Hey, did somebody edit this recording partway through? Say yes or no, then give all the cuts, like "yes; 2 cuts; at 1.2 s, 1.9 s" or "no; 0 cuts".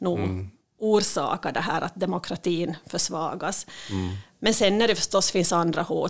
no; 0 cuts